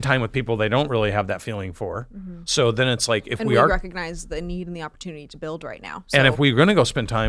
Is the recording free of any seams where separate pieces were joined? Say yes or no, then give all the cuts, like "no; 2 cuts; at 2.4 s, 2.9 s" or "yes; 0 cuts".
no; 1 cut; at 2.5 s